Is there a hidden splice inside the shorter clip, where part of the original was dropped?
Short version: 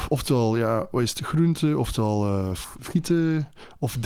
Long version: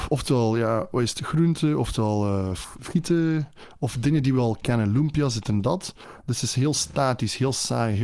no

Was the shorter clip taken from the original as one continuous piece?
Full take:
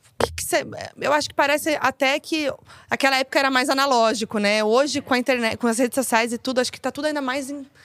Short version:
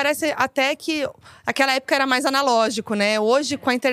yes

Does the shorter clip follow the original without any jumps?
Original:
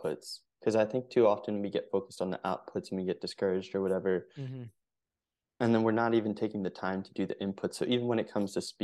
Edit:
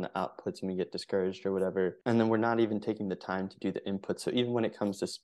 no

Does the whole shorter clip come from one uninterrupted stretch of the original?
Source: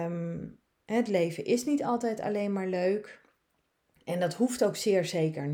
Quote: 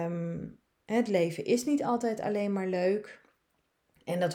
yes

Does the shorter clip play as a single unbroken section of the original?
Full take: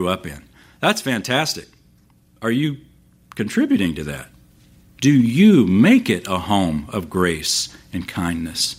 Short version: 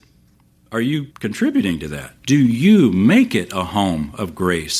no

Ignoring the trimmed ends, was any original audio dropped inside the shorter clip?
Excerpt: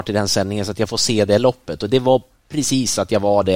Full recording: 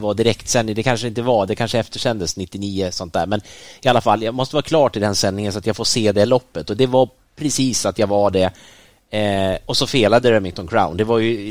no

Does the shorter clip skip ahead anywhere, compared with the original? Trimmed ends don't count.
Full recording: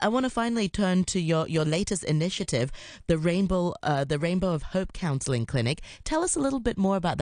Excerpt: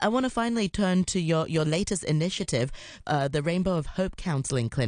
yes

